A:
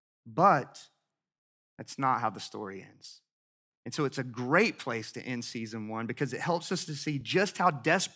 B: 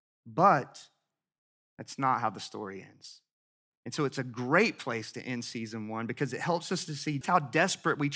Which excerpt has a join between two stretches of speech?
B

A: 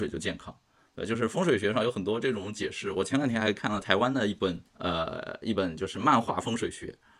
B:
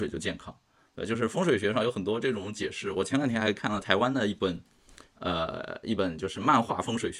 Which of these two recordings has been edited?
A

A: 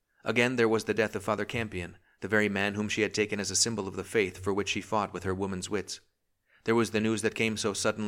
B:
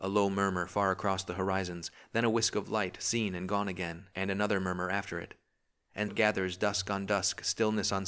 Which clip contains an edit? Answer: B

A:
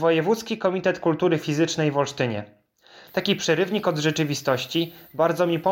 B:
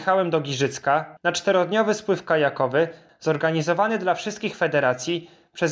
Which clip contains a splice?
B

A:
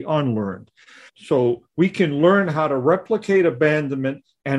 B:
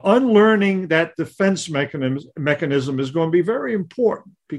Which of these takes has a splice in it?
A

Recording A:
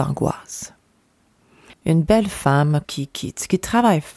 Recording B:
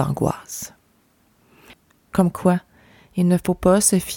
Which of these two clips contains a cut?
A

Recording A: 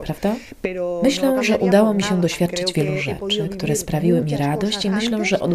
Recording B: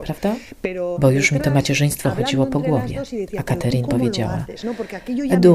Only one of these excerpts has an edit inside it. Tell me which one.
B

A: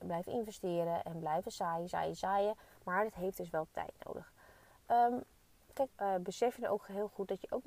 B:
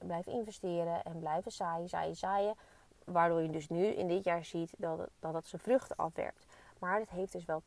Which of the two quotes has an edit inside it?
A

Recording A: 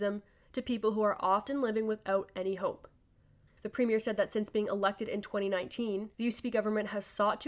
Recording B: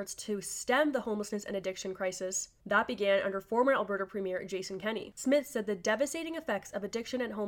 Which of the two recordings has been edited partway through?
A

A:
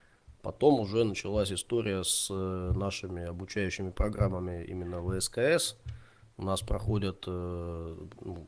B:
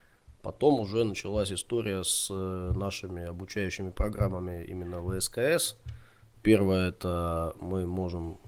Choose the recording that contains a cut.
B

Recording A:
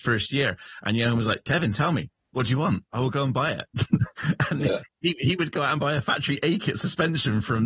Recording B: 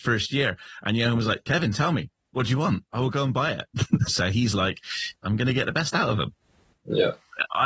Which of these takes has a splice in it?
B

